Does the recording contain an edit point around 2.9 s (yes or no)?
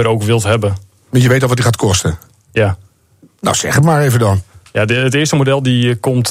no